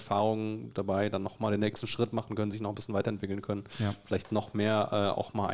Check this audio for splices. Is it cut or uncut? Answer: uncut